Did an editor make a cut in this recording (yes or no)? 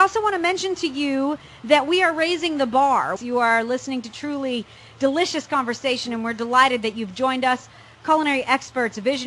yes